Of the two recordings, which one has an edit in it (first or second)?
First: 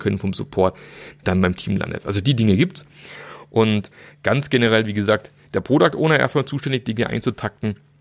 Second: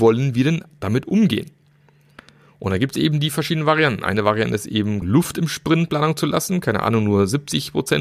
second